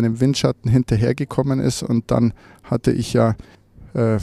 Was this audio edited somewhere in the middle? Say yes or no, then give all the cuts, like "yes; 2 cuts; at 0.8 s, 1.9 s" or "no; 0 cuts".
no; 0 cuts